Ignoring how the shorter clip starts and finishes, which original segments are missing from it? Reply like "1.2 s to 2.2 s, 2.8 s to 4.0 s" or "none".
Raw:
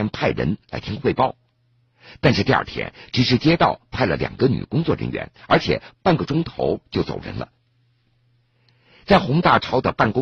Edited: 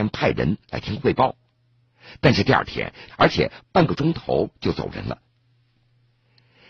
3.1 s to 5.4 s